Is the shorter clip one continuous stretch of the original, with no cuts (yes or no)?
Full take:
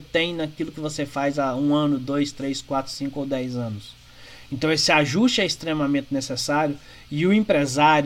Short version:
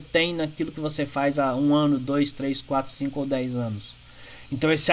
yes